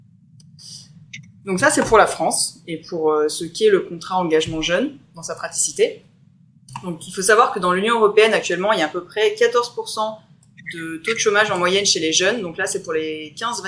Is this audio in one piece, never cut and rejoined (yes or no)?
yes